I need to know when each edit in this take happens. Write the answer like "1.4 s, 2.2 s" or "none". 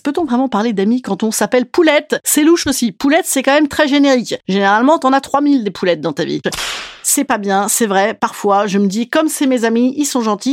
6.4 s